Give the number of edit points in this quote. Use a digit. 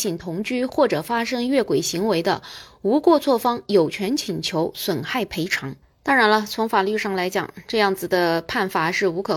0